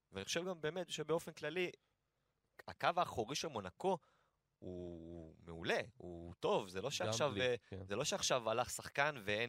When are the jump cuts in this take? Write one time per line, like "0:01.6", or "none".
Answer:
none